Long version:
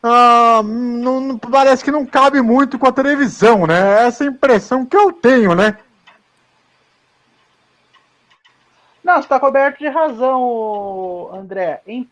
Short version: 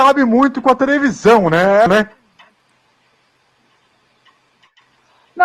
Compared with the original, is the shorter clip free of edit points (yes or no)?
no